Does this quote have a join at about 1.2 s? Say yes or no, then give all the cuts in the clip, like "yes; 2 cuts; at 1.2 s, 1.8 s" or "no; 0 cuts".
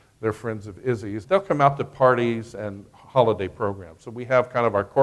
yes; 1 cut; at 1.2 s